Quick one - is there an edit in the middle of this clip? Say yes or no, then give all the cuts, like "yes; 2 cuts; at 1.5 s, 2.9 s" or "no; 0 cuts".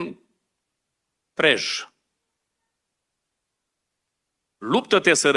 no; 0 cuts